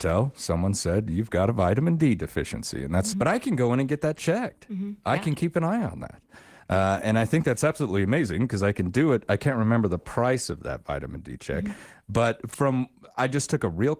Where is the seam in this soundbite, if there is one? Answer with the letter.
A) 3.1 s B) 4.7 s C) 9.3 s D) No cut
A